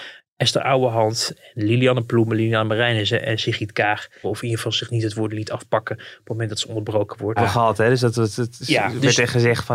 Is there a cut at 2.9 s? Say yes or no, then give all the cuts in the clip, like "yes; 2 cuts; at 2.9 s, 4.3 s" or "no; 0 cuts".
no; 3 cuts; at 4.2 s, 7.4 s, 8.6 s